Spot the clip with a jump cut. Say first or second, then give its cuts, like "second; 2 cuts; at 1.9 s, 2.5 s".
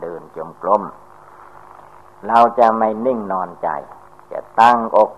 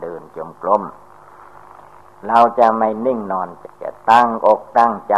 second; 1 cut; at 3.6 s